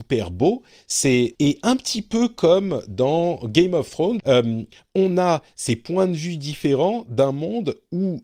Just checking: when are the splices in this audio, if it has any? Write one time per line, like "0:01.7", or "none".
0:01.3
0:04.2